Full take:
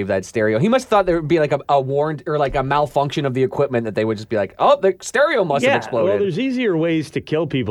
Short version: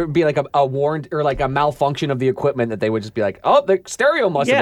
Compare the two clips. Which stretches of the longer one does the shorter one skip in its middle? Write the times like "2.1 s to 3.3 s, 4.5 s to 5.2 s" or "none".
none